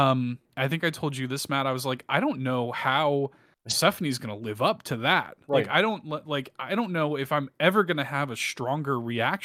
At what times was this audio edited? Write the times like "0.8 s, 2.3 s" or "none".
none